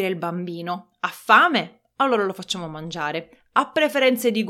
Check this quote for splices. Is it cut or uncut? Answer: uncut